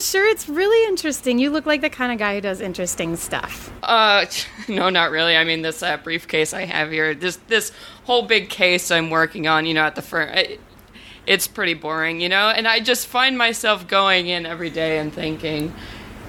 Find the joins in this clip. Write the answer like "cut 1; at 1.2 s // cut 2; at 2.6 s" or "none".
none